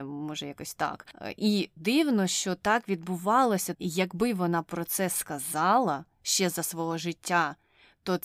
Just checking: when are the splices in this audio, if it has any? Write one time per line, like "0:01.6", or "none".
0:01.8
0:03.7